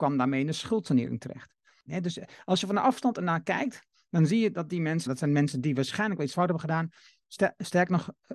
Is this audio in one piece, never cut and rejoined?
no; 2 cuts; at 1.9 s, 5.1 s

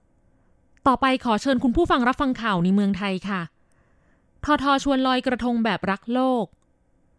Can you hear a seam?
yes; 1 cut; at 4.6 s

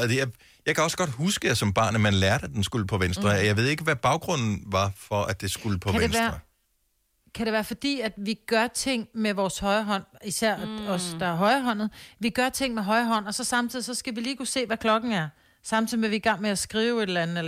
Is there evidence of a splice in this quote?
no; 0 cuts

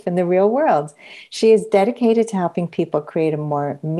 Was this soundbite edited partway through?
no; 0 cuts

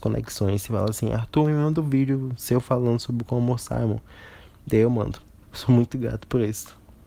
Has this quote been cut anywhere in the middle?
yes; 1 cut; at 5.4 s

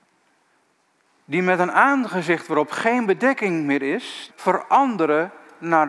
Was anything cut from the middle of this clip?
yes; 1 cut; at 4.3 s

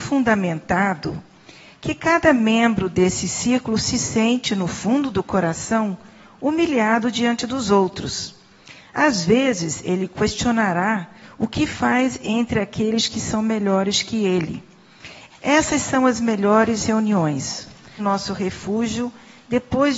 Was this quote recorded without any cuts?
no; 2 cuts; at 15.3 s, 18.0 s

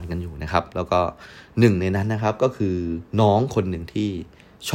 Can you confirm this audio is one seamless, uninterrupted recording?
no; 1 cut; at 3.1 s

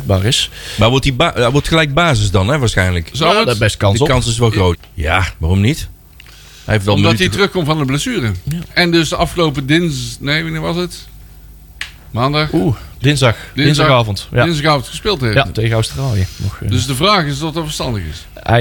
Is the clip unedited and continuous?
no; 1 cut; at 4.7 s

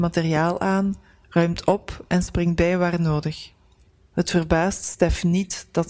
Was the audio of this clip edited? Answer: yes; 1 cut; at 4.1 s

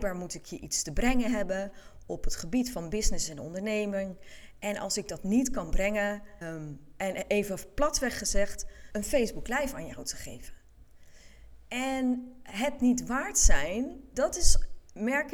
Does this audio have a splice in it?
yes; 3 cuts; at 6.4 s, 8.9 s, 14.1 s

